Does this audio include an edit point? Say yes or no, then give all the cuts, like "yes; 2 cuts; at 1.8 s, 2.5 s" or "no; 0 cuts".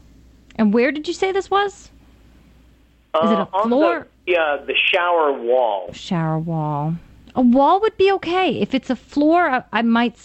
yes; 1 cut; at 4.3 s